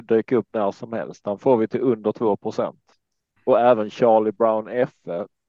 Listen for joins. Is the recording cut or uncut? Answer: uncut